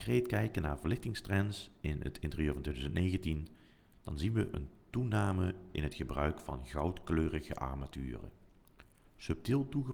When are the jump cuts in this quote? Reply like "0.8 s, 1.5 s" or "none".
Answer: none